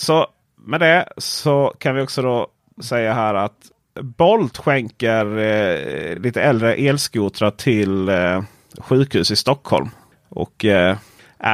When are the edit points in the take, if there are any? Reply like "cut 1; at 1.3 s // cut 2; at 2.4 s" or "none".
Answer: none